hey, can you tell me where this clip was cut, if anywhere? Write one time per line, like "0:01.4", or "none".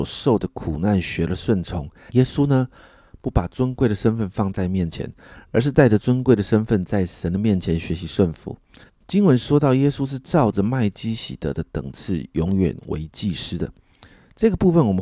0:02.1
0:08.9